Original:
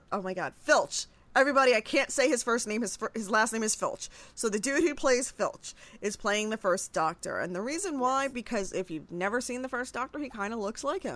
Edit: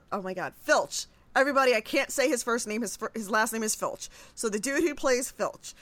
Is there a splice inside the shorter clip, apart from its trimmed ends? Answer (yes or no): no